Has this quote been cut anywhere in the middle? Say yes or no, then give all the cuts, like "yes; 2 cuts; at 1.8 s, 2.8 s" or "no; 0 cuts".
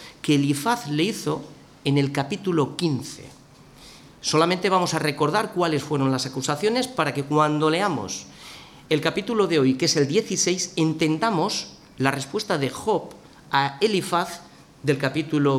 no; 0 cuts